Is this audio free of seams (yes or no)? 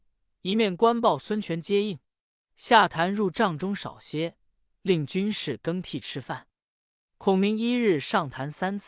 no